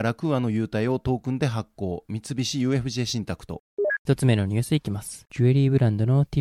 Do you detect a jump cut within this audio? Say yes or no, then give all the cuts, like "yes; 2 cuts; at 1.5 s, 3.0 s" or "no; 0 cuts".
yes; 1 cut; at 4.1 s